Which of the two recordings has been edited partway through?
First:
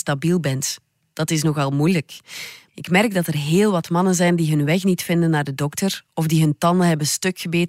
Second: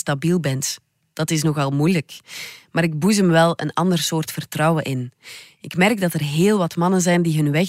first; 1 cut; at 2.7 s

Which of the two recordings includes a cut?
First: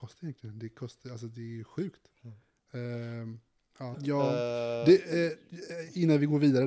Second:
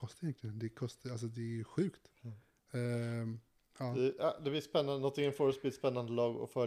first; 1 cut; at 3.9 s

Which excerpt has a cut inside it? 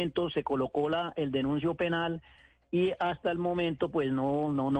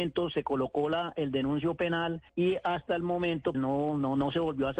second; 2 cuts; at 2.3 s, 3.5 s

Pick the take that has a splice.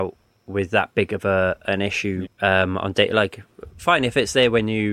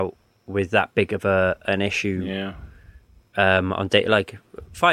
first; 1 cut; at 2.2 s

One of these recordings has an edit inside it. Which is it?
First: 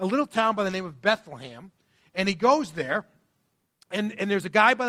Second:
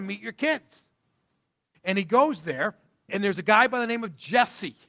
second; 2 cuts; at 1.7 s, 3.1 s

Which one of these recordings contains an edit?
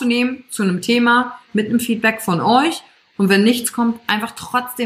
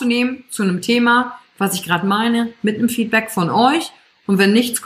first; 1 cut; at 1.5 s

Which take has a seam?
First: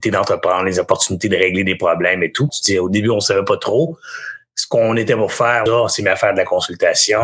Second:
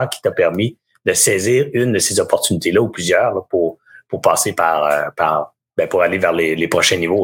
first; 2 cuts; at 2.5 s, 5.7 s

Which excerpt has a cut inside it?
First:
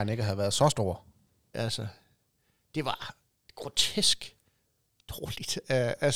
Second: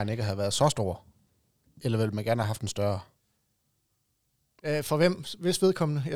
first; 1 cut; at 1.5 s

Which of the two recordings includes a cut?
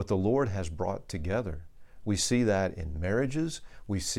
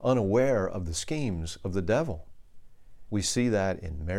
second; 1 cut; at 3.1 s

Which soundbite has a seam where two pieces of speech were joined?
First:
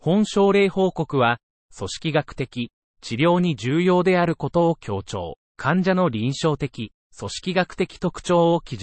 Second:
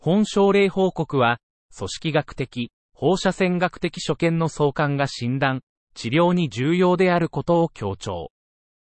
first; 3 cuts; at 2.8 s, 5.5 s, 7.0 s

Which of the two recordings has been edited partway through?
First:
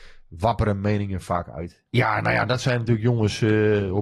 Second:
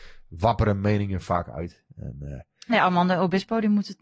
first; 1 cut; at 1.9 s

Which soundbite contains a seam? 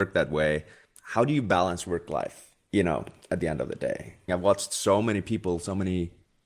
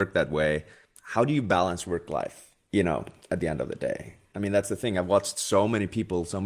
first; 1 cut; at 4.3 s

